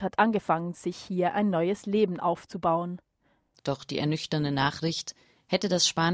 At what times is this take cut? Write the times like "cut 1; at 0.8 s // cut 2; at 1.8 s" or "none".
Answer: cut 1; at 3.6 s